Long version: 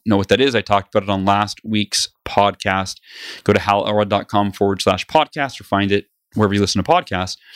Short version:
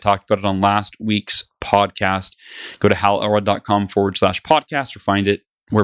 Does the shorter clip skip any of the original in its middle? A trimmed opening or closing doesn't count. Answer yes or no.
no